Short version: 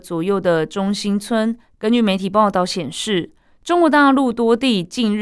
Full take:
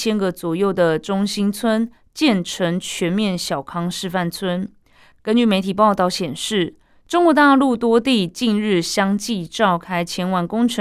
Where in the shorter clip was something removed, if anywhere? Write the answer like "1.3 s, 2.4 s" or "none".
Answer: 1.8 s